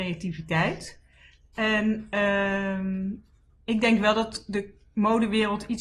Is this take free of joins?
yes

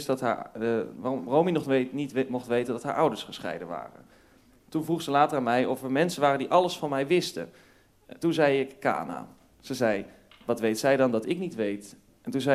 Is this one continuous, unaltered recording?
yes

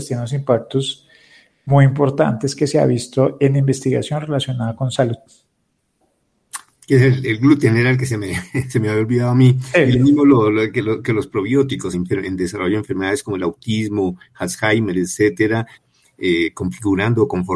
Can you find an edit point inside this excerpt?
yes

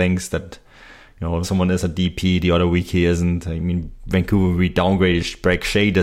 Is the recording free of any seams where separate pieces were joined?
no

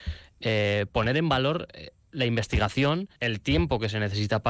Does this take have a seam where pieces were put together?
yes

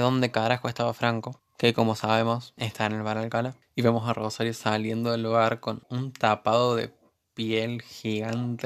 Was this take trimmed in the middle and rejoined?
no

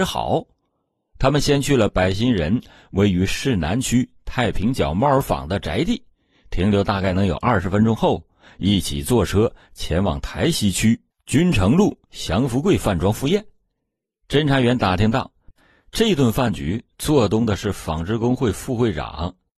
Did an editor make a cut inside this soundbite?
no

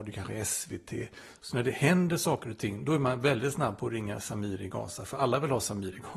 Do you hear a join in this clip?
no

